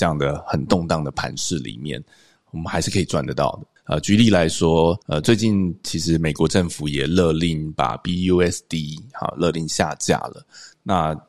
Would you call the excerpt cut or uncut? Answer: cut